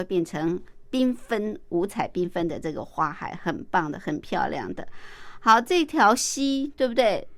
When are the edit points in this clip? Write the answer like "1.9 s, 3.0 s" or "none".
none